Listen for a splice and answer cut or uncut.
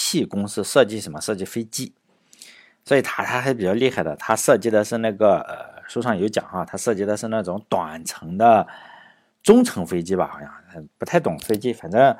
uncut